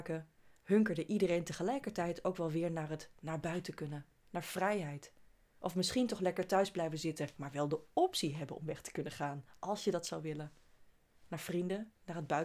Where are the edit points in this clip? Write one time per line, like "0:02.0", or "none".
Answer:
none

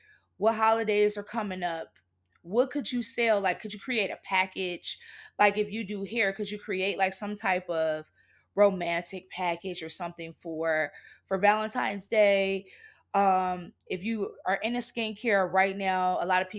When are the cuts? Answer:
none

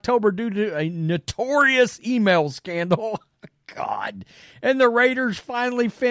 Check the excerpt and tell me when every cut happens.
none

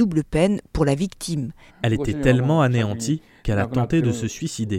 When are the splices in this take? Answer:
0:01.7

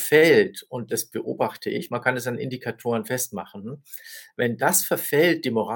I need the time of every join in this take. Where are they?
none

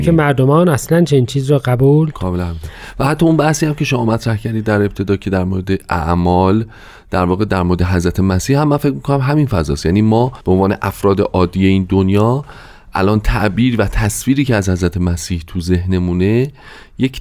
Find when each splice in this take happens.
0:02.1
0:10.4

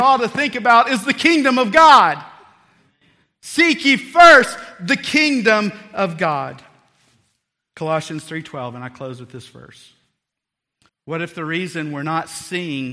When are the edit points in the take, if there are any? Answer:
0:10.9

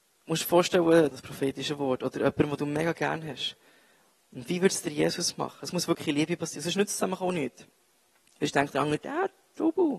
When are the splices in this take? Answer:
0:01.1

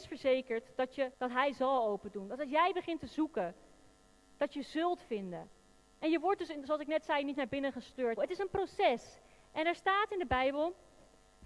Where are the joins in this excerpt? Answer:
0:01.1
0:08.2

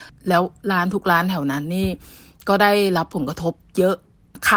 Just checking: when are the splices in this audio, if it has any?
none

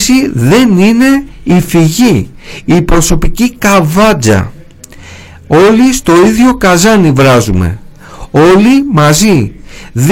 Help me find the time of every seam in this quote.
none

